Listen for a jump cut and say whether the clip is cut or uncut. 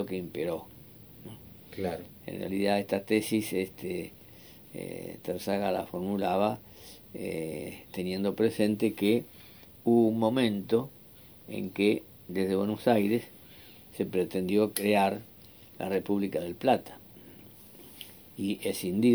uncut